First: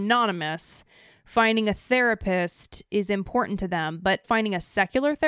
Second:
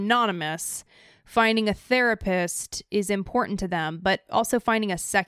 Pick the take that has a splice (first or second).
first